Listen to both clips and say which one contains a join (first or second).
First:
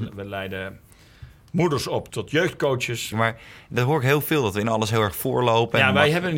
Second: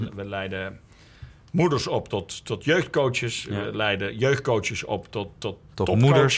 first